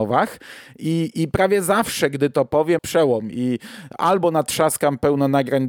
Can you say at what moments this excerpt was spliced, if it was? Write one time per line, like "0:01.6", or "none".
0:02.8